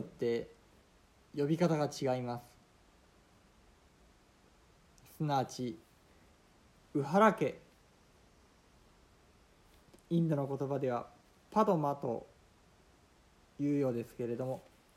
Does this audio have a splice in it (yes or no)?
yes